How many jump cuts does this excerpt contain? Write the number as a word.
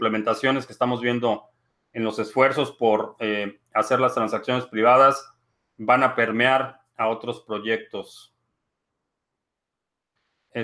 zero